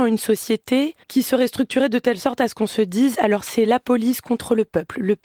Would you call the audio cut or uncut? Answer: cut